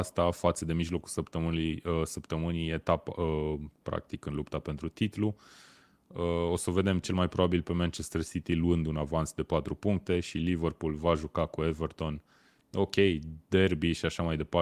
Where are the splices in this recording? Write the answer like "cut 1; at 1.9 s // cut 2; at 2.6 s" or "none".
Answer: cut 1; at 3.8 s